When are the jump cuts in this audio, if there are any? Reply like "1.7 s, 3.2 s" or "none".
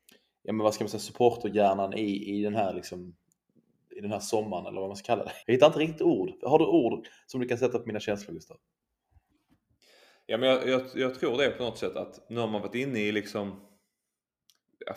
5.4 s